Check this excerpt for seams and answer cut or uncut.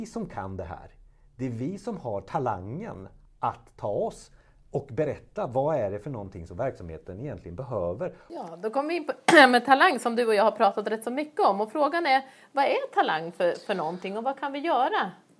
uncut